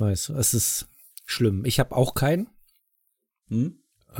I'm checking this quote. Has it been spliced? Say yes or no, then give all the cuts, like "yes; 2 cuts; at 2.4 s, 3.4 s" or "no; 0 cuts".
no; 0 cuts